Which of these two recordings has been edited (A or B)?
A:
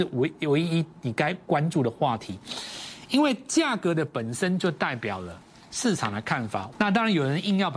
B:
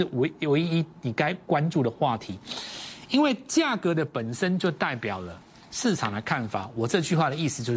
A